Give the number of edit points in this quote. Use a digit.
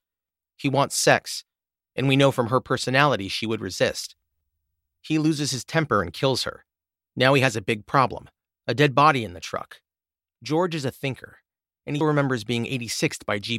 1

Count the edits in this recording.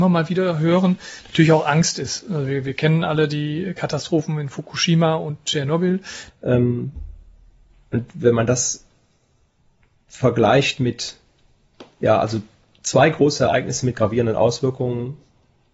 1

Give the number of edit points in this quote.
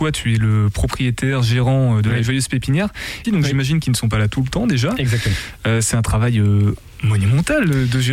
1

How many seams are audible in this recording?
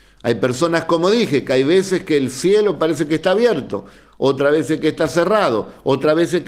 0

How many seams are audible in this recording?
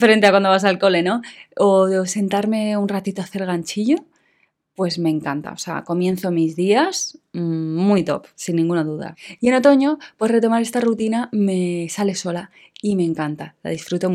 0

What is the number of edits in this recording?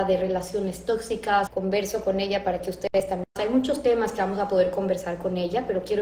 2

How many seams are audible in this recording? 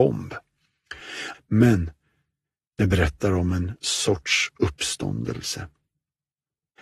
1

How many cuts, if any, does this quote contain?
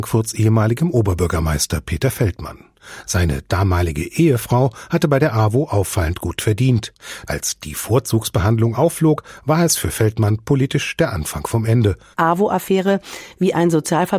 2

